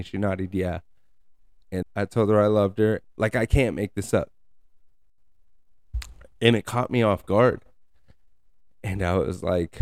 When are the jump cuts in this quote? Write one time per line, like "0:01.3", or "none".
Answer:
0:01.8
0:03.0

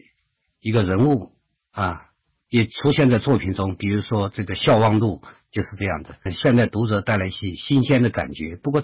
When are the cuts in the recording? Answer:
0:06.3

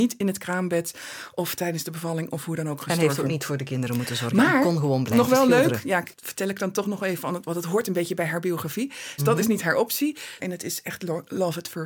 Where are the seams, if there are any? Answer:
0:09.2
0:10.4

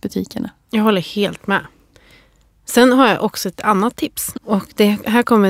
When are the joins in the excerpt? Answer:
0:04.3

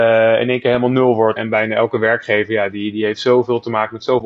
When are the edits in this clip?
0:01.4

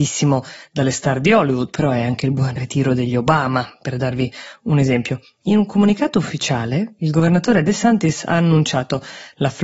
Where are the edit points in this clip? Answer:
none

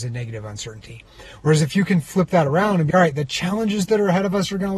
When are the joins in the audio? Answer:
0:02.9

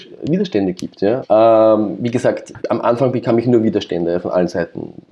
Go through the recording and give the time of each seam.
0:01.2
0:02.6

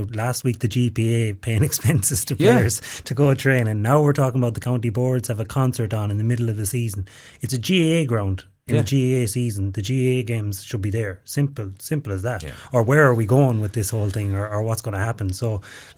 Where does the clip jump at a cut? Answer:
none

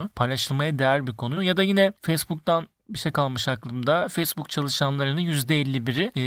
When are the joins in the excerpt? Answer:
0:01.4

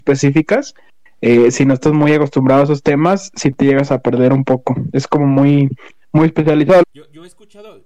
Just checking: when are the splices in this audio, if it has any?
0:06.8

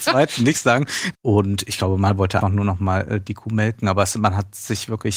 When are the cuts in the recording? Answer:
0:01.1
0:02.4

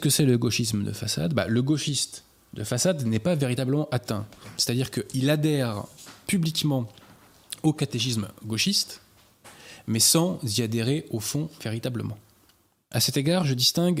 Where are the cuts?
0:12.8

